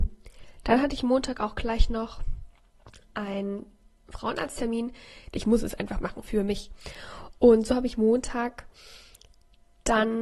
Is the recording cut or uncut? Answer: cut